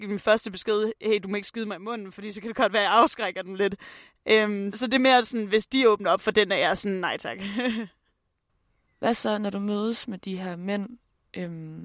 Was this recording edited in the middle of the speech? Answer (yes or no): yes